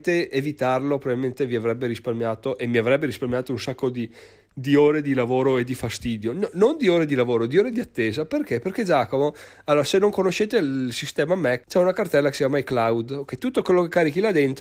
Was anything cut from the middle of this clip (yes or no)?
yes